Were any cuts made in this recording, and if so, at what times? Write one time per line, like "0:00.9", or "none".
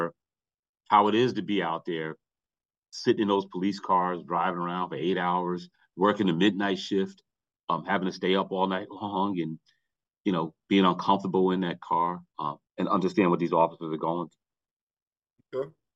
0:12.7